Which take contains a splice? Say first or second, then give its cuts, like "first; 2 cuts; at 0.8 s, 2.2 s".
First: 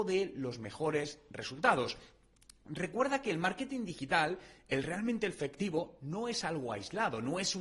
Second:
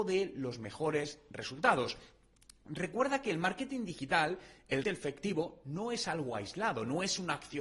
second; 1 cut; at 4.8 s